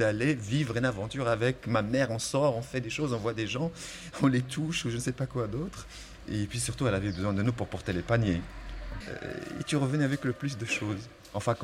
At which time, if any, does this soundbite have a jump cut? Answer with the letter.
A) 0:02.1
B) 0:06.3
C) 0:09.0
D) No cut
C